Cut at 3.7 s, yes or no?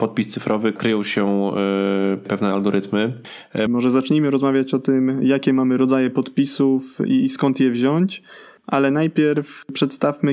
yes